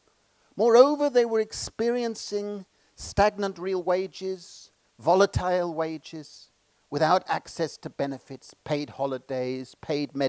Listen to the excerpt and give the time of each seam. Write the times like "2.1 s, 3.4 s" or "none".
8.6 s